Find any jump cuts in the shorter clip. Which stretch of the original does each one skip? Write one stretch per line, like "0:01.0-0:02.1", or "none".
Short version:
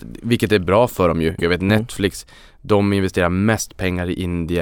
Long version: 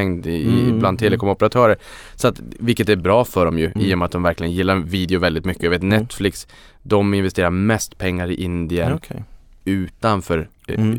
0:03.7-0:05.6